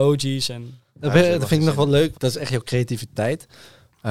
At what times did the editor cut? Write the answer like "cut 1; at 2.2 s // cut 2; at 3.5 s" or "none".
cut 1; at 2.1 s